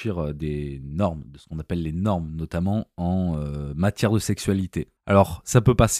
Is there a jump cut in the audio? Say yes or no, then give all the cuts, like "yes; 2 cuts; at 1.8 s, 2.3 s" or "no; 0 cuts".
no; 0 cuts